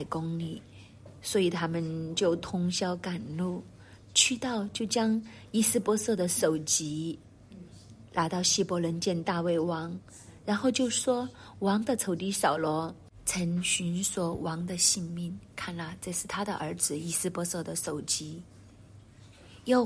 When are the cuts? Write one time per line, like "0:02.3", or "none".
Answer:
none

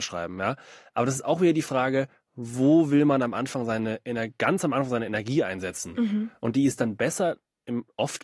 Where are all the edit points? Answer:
none

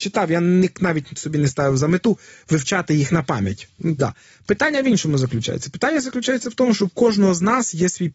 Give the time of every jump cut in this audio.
0:04.0

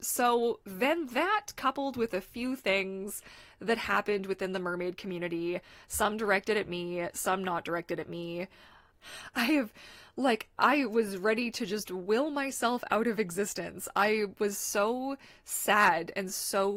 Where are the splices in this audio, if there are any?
0:08.9

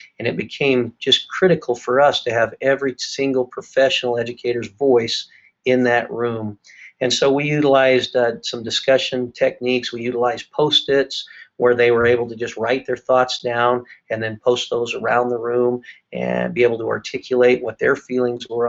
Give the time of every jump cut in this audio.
none

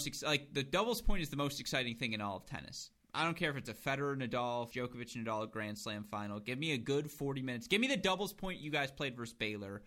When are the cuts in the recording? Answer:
0:04.7

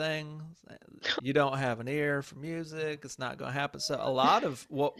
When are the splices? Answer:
0:01.2

